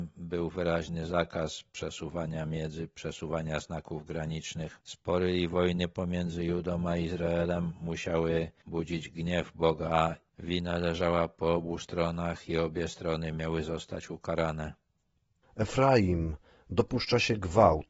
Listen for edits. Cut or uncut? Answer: uncut